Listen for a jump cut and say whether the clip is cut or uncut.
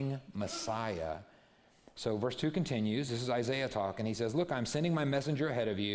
uncut